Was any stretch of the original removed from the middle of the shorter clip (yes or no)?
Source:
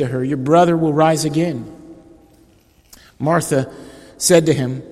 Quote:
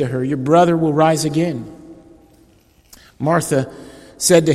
no